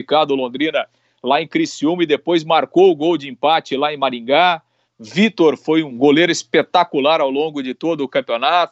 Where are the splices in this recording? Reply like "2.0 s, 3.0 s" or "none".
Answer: 4.8 s, 5.9 s

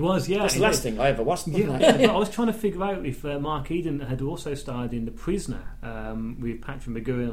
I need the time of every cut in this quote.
1.8 s

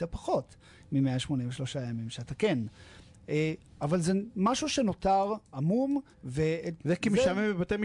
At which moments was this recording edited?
6.1 s

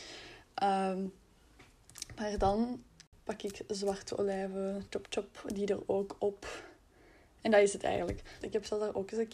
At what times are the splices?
4.9 s, 8.4 s

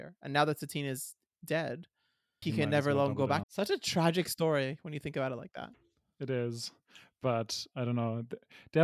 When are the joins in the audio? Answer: 2.4 s, 3.4 s

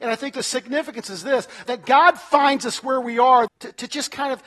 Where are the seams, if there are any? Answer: 1.7 s, 3.5 s

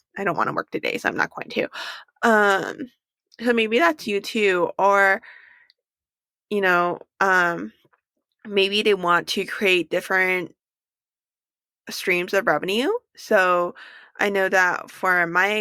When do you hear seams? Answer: none

